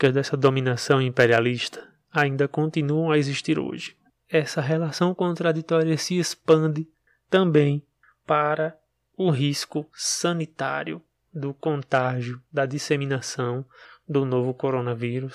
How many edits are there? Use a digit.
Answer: 1